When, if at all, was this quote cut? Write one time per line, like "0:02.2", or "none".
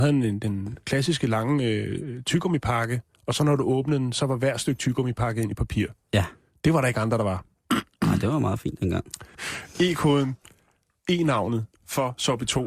0:09.3